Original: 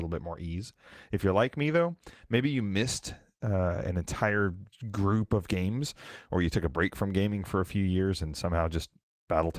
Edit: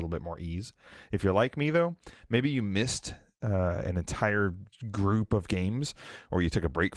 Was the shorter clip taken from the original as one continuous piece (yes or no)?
yes